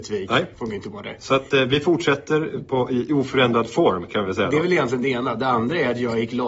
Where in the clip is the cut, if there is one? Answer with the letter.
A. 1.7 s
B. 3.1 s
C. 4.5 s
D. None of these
D